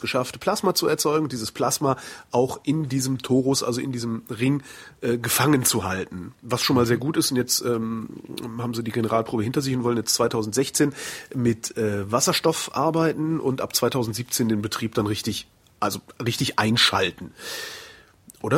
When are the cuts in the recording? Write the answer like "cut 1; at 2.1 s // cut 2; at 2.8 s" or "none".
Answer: none

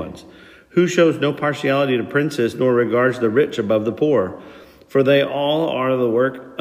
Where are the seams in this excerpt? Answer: none

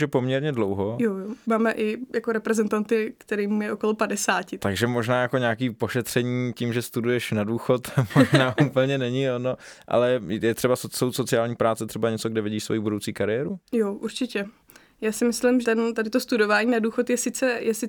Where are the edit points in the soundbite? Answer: cut 1; at 15.6 s

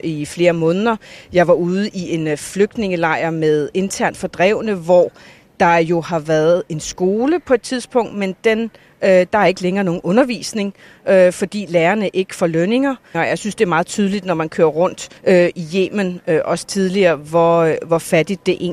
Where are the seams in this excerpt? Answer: cut 1; at 13.1 s // cut 2; at 15.2 s

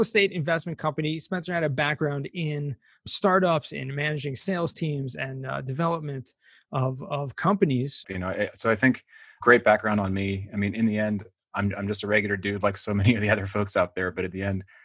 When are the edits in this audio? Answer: cut 1; at 8.0 s

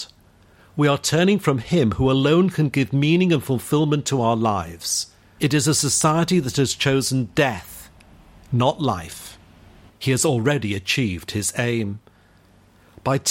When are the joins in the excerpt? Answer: cut 1; at 5.4 s // cut 2; at 9.9 s

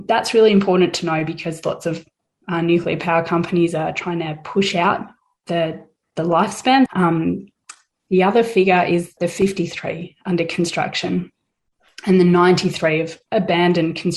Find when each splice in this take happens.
cut 1; at 6.9 s // cut 2; at 9.2 s

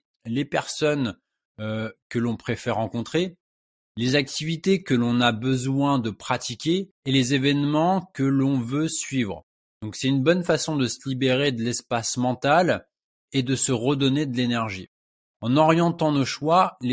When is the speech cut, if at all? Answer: cut 1; at 7.0 s

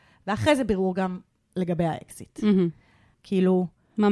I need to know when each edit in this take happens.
cut 1; at 3.1 s

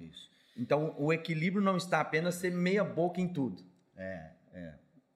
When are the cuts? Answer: none

